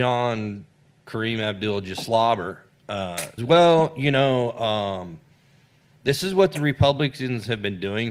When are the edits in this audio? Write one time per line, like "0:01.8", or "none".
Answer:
0:03.4